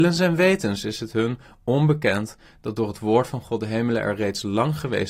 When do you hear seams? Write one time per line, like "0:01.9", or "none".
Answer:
none